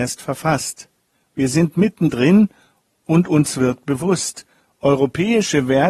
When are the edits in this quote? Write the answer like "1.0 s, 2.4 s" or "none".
1.1 s

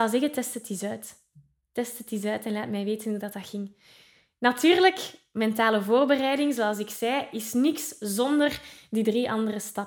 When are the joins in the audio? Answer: none

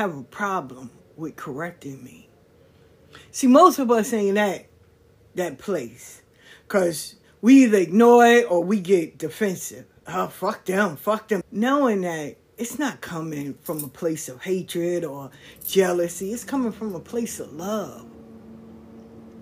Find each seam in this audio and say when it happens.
11.4 s

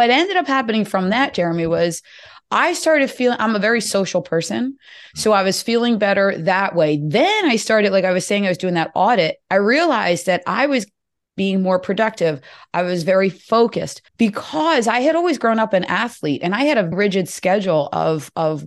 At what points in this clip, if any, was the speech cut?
12.6 s, 14.1 s, 16.9 s

